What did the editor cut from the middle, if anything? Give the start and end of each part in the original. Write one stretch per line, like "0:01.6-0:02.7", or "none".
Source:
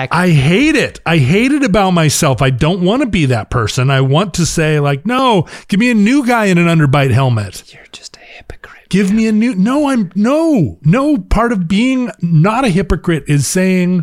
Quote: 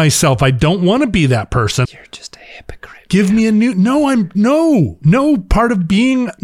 0:03.8-0:07.7